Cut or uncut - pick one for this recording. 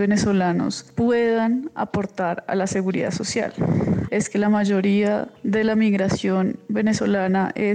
cut